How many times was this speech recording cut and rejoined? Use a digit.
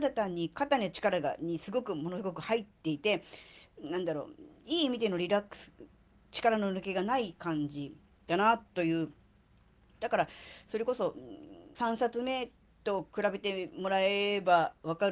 2